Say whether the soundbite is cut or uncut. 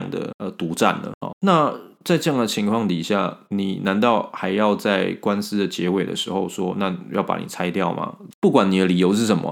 cut